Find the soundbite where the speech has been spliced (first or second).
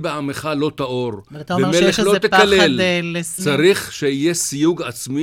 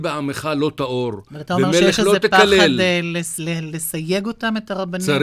first